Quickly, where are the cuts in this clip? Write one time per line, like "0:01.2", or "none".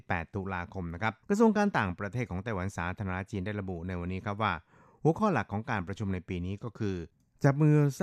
0:01.2